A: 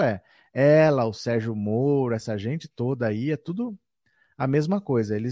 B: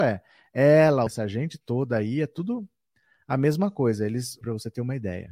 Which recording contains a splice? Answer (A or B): B